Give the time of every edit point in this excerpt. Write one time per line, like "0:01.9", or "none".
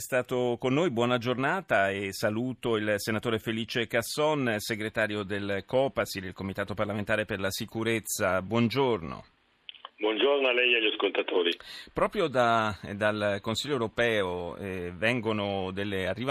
none